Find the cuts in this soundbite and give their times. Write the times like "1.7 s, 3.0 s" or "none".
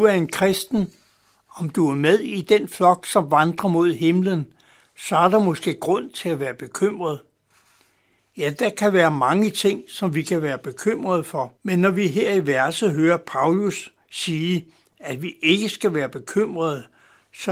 8.2 s, 11.6 s